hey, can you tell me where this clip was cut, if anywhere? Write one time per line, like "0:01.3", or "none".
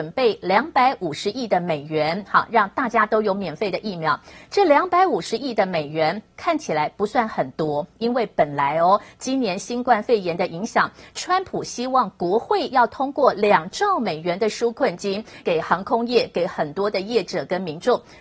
0:15.4

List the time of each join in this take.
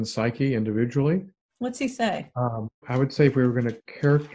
0:01.4
0:02.8

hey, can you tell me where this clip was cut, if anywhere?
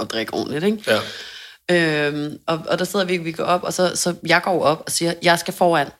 none

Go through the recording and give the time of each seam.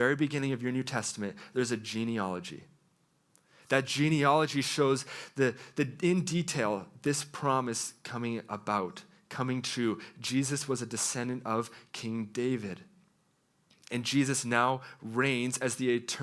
none

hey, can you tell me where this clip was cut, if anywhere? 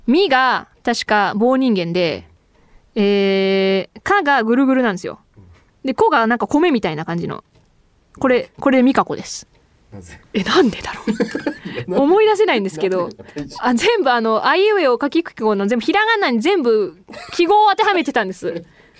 0:02.4
0:10.2

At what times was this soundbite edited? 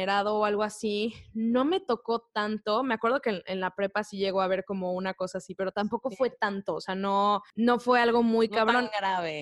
none

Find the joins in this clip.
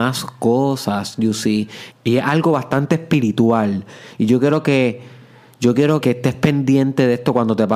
0:01.9
0:06.0

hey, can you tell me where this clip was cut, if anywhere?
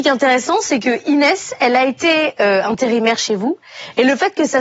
none

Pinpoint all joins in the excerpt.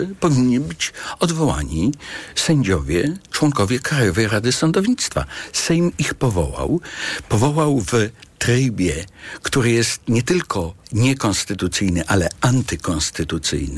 0:10.8

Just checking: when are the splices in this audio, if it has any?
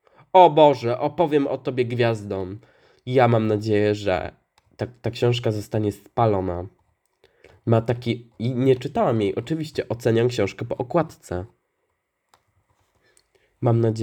none

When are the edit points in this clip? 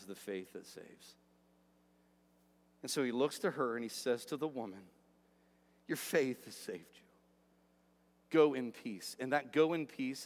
none

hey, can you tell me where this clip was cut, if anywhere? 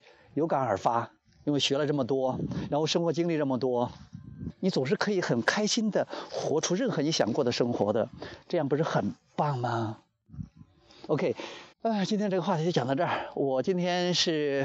0:04.5
0:11.7

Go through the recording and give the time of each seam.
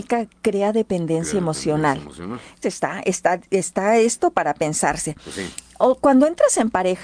0:02.6

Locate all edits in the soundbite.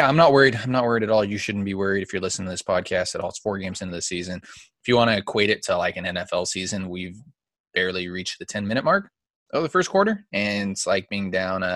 none

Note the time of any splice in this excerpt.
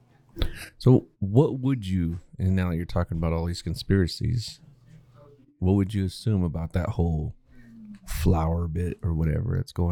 0:01.1

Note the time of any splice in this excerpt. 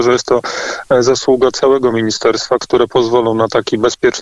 0:02.6

